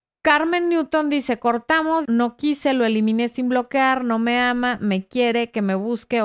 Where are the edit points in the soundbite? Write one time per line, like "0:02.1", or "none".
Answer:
0:02.0